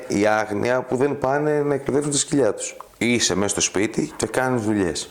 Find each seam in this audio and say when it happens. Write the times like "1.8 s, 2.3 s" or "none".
2.9 s